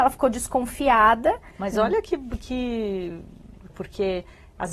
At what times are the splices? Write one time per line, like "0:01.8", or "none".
0:01.5
0:03.7